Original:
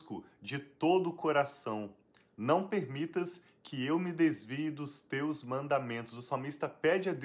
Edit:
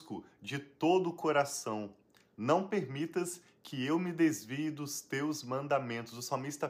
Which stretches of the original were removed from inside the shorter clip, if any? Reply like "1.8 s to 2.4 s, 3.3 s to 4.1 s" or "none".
none